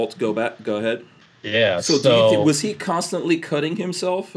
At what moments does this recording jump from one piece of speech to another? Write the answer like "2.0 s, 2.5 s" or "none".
1.3 s